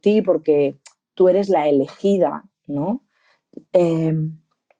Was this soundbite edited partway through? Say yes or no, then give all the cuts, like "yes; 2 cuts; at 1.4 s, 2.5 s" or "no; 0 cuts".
yes; 1 cut; at 3.6 s